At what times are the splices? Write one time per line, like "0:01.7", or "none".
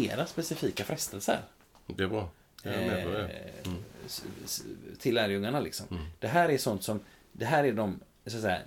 none